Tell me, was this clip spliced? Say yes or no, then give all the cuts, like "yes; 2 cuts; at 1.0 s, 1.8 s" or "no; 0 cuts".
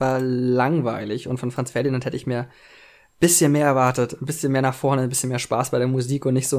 no; 0 cuts